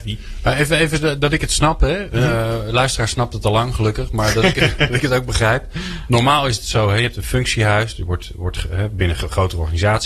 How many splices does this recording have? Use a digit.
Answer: 0